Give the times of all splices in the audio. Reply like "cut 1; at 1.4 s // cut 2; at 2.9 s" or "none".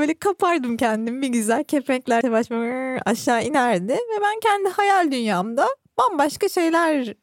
cut 1; at 2.2 s